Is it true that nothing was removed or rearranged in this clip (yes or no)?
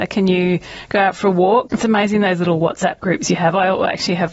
no